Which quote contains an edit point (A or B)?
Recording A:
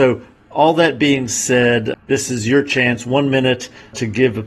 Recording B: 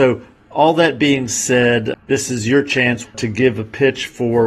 B